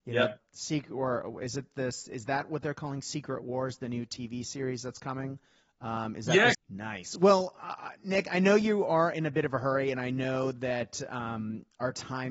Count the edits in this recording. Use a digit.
1